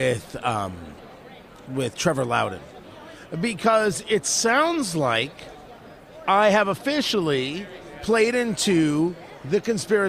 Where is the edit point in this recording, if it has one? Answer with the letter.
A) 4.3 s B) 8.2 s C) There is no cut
C